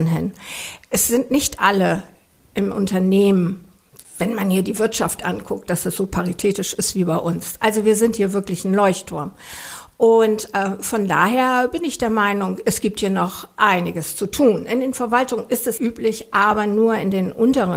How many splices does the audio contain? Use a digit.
1